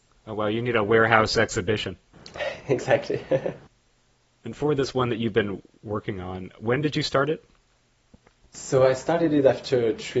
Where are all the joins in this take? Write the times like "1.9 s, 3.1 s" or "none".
none